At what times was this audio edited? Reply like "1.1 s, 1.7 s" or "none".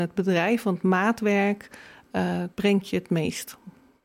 2.5 s